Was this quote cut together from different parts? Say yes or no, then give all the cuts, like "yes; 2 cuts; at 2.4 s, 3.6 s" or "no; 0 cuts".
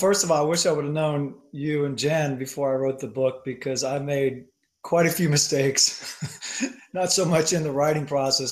no; 0 cuts